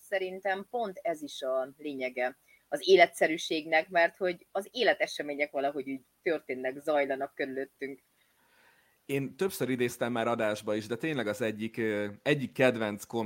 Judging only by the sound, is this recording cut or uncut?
uncut